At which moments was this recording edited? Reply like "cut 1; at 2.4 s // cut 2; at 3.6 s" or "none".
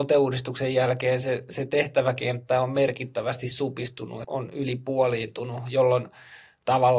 cut 1; at 4.2 s